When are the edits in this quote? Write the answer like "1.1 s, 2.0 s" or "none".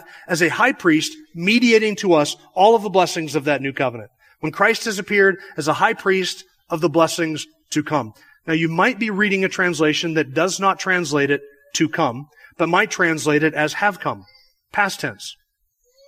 none